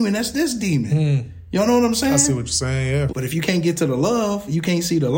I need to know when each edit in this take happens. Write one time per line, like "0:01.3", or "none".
0:03.1